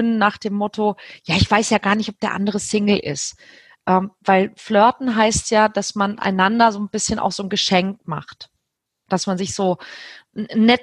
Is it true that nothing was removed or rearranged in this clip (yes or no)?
yes